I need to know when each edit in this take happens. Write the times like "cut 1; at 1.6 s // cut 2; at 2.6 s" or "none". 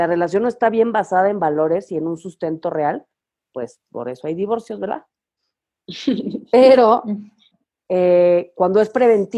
none